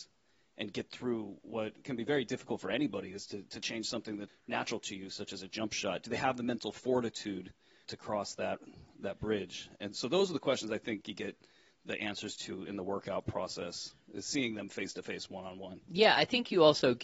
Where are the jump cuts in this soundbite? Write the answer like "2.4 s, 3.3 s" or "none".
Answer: 4.3 s, 7.8 s